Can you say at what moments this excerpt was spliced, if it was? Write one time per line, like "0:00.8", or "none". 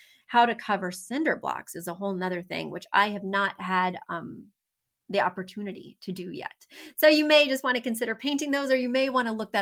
none